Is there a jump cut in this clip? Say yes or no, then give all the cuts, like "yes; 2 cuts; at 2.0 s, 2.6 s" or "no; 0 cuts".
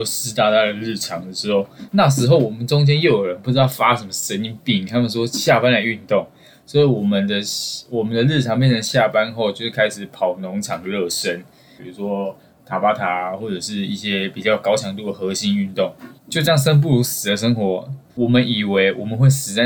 yes; 3 cuts; at 11.8 s, 16.2 s, 18.1 s